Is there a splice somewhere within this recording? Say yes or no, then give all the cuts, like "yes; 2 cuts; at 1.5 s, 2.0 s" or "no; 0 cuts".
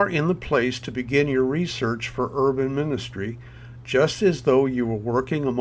no; 0 cuts